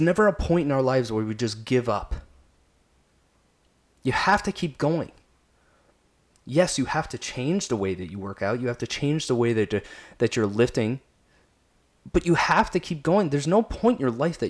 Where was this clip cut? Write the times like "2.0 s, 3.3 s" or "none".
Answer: none